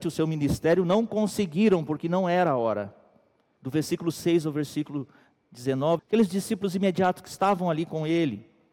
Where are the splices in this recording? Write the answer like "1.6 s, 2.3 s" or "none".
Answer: 3.6 s, 6.0 s